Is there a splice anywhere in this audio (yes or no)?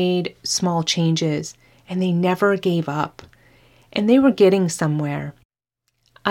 no